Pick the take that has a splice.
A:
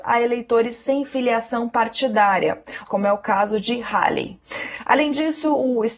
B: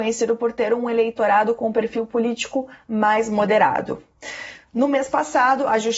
A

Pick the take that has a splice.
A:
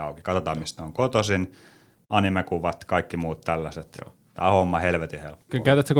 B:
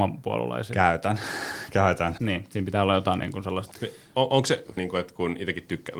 B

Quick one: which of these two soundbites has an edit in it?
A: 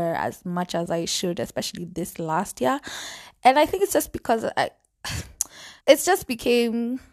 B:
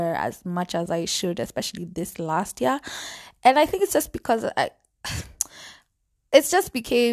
A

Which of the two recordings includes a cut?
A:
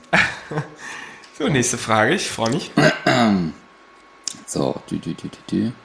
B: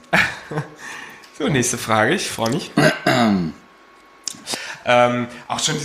B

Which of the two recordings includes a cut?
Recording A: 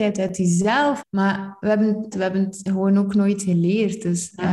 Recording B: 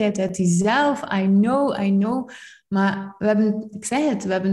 A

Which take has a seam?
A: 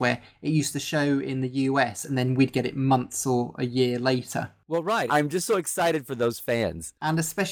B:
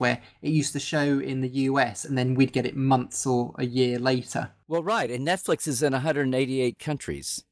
A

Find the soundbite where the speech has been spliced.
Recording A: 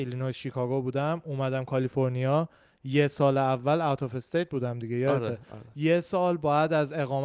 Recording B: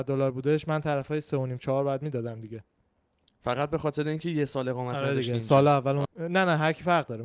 B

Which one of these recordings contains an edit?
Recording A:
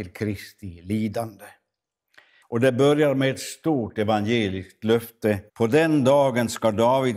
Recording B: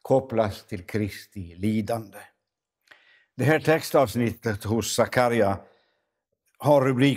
A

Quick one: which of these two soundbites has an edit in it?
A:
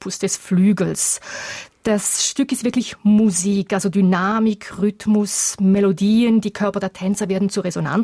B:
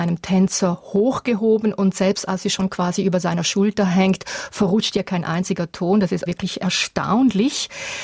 B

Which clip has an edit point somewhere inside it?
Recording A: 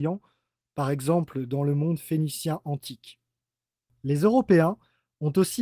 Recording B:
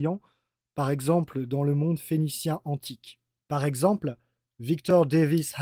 B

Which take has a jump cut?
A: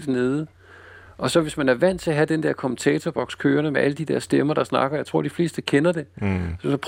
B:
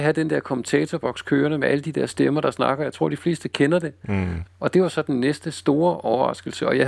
B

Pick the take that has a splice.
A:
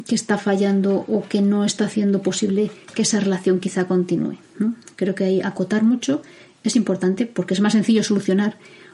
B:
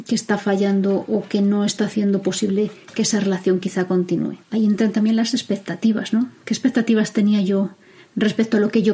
B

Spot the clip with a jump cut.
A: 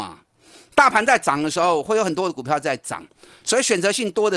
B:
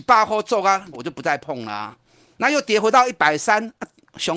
B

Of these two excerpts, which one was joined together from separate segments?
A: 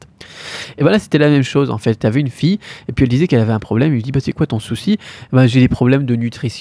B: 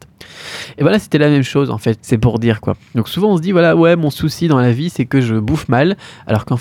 B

